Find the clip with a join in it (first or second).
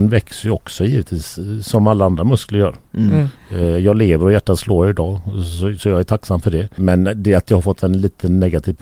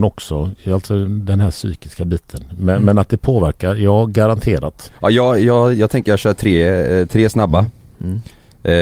first